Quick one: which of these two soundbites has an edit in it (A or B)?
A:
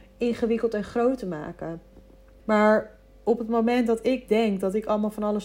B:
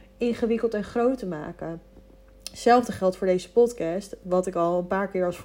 A